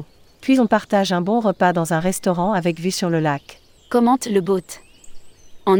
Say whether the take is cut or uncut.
uncut